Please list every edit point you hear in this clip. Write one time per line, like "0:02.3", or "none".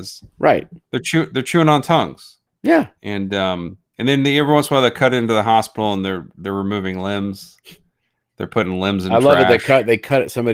0:03.0